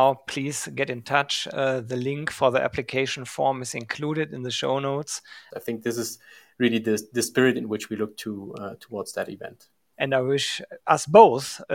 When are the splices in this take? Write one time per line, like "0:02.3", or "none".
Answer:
0:05.5
0:09.9